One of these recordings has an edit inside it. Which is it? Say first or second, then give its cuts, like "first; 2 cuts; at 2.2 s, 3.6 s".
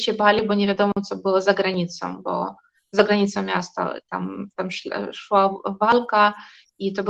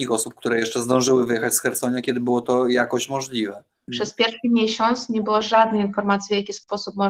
second; 1 cut; at 3.9 s